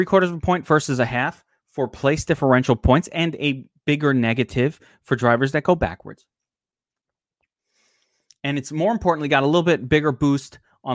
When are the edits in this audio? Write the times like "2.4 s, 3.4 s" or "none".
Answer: none